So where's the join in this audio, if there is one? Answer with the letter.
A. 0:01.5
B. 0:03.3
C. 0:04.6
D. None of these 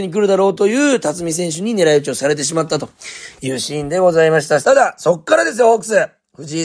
C